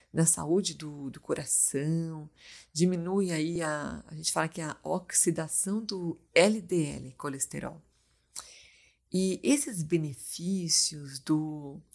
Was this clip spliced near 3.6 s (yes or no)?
no